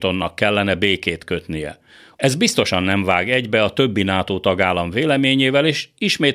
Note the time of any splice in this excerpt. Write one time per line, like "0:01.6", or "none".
0:02.2